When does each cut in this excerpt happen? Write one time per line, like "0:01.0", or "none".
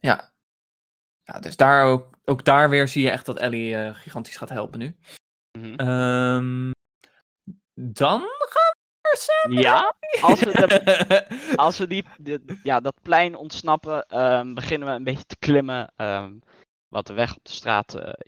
none